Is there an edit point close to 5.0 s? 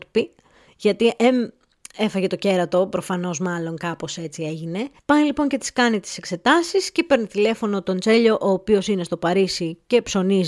yes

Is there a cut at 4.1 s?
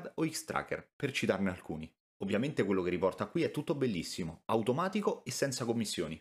no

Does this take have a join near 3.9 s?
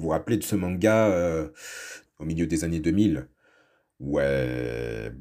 no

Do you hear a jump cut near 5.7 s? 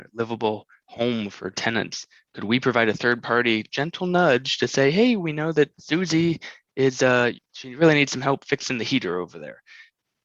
yes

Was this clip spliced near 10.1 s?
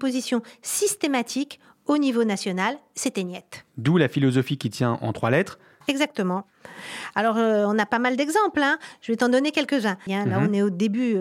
yes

